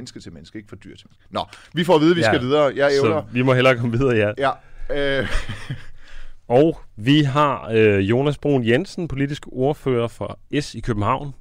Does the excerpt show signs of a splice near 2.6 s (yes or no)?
no